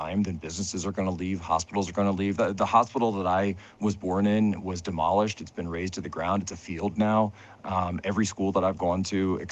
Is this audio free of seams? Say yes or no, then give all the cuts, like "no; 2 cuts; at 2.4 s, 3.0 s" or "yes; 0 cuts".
yes; 0 cuts